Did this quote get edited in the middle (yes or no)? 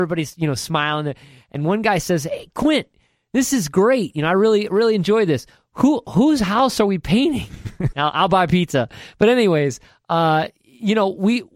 yes